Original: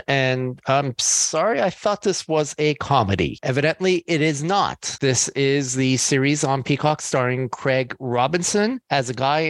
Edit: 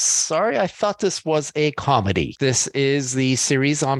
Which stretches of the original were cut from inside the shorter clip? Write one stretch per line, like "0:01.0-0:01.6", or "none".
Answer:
0:03.4-0:05.0